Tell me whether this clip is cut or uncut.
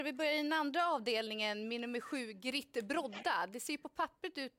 uncut